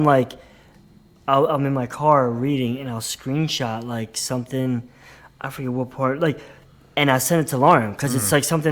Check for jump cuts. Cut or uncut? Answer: uncut